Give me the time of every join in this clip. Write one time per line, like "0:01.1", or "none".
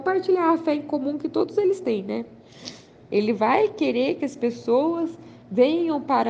0:03.1